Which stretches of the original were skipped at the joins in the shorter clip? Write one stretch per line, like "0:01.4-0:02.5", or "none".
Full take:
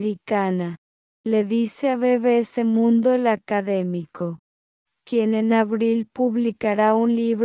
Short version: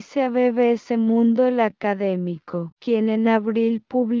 0:04.4-0:05.0